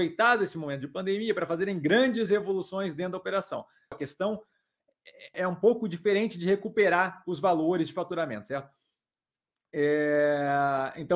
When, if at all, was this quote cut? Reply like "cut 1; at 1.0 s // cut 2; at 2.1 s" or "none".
cut 1; at 3.9 s // cut 2; at 5.3 s